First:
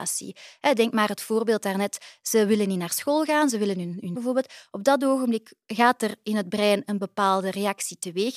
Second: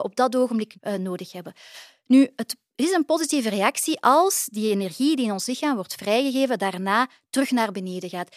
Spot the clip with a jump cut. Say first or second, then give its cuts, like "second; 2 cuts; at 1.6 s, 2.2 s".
first; 1 cut; at 4.1 s